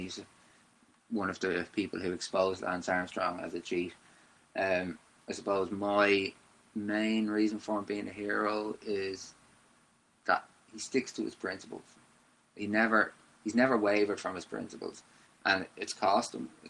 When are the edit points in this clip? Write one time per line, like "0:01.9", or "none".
none